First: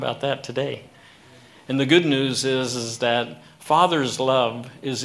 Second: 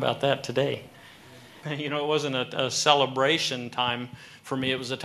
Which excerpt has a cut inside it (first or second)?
second